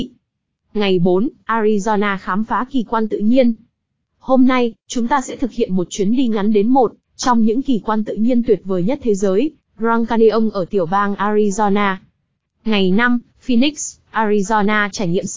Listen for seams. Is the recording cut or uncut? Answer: cut